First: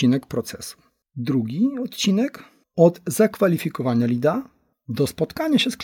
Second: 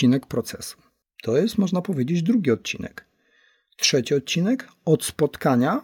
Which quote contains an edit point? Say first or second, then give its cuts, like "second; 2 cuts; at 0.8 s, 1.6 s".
second; 1 cut; at 1.1 s